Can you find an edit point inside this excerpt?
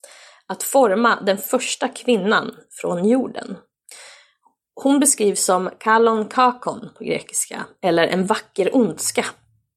no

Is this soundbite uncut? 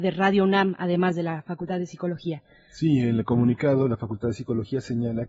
yes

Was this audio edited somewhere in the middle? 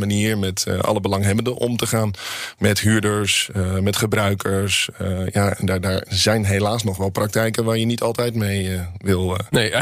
no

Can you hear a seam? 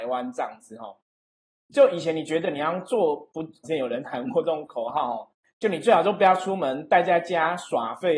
yes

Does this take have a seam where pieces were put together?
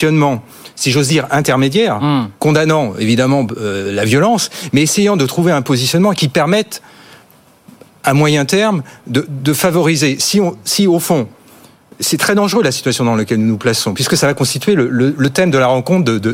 no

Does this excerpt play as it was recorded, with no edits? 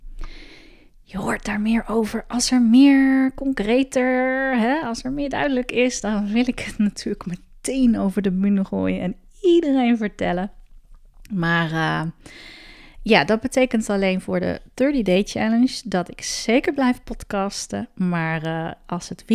yes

